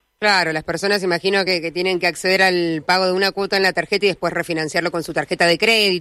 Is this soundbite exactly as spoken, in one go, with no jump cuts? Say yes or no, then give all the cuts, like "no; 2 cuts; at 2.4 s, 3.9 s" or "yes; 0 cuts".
yes; 0 cuts